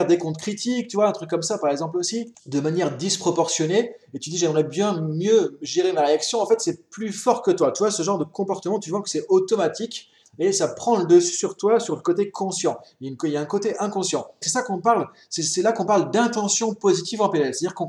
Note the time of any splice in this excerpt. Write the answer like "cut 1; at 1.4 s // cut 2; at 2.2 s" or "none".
cut 1; at 2.4 s // cut 2; at 14.4 s